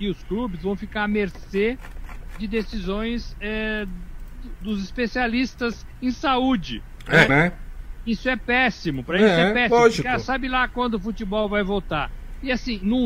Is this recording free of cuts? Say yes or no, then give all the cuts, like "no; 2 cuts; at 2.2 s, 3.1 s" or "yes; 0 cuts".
no; 1 cut; at 7.3 s